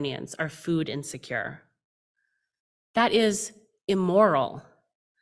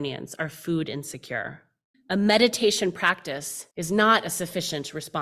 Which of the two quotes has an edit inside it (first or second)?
second